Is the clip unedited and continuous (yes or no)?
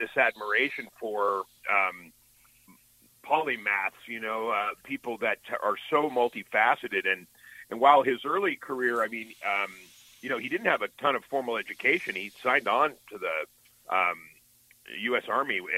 no